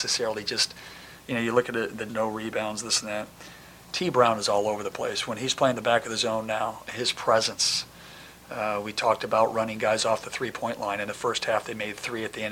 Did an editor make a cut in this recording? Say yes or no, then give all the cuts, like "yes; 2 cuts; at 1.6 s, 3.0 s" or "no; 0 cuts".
yes; 1 cut; at 2.1 s